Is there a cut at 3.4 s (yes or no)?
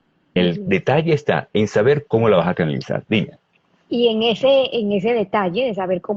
no